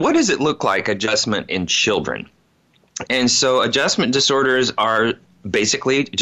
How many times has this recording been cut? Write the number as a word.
one